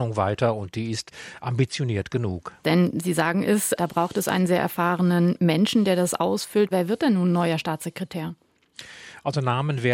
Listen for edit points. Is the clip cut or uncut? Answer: cut